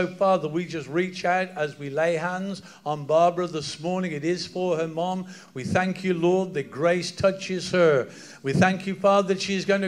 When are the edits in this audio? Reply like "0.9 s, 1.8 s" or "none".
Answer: none